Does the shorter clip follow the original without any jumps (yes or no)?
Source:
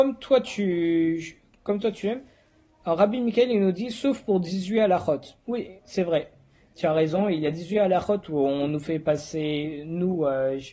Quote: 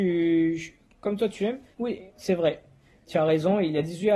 no